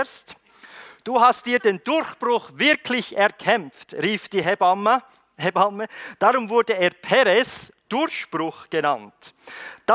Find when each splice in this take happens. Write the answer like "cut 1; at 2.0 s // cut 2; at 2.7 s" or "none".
none